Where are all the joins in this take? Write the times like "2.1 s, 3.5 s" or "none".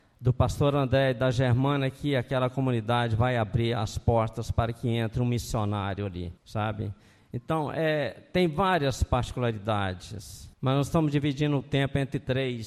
6.4 s, 10.5 s

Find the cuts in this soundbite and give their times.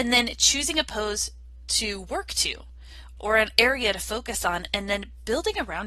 3.2 s

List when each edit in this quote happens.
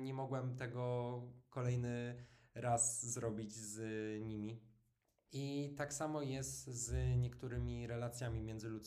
5.3 s

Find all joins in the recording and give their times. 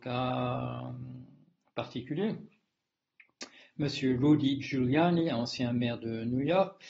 none

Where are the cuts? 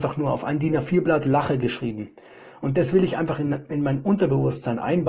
none

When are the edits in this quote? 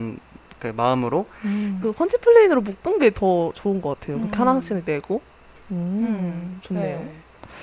1.8 s

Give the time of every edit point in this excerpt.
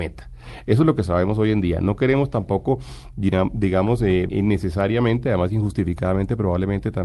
4.3 s

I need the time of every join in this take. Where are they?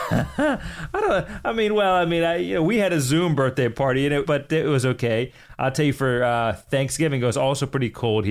4.2 s

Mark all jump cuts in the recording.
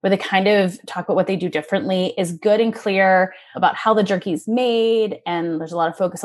3.5 s

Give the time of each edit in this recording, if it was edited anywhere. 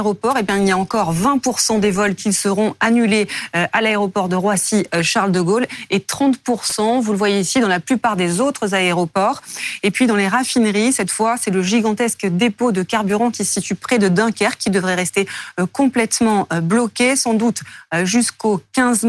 none

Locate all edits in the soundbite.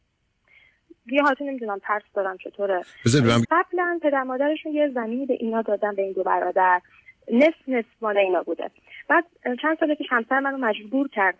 3.4 s

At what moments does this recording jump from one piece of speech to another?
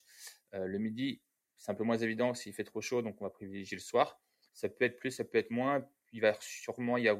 4.5 s

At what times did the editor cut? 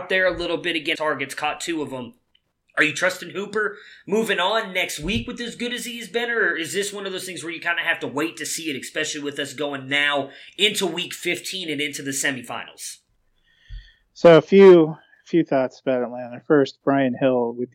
1.0 s

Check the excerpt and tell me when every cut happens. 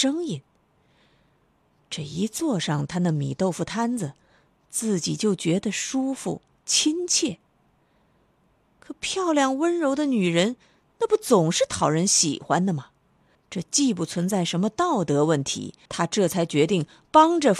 13.4 s, 15.9 s

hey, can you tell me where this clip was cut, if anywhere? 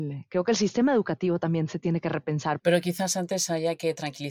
2.6 s

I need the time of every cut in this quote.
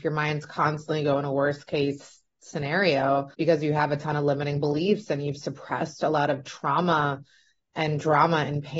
3.3 s

